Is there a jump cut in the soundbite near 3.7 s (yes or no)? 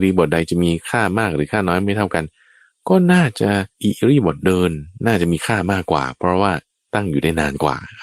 yes